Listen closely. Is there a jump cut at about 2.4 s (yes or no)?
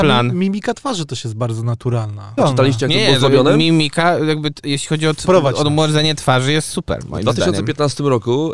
yes